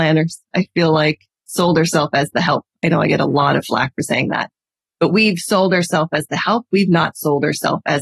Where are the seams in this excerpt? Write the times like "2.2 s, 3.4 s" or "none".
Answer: none